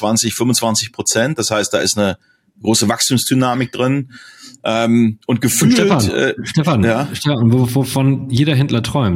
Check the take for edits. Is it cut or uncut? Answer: uncut